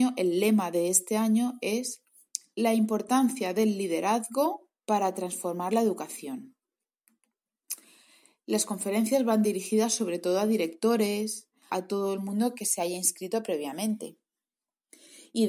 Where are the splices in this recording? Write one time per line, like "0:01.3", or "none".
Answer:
0:11.7